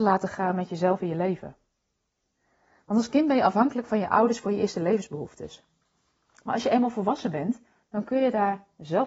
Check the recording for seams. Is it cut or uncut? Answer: uncut